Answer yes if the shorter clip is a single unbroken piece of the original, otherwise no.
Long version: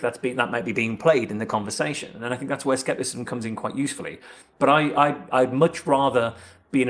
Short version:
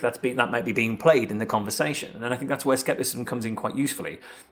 yes